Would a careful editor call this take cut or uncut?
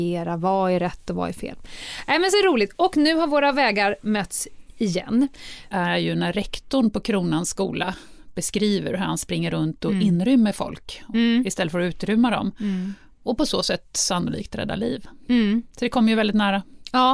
cut